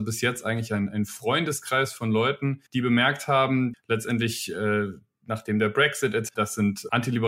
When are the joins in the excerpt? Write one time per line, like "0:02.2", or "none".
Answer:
0:02.7
0:03.7
0:06.3